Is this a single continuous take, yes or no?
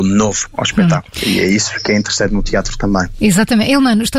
yes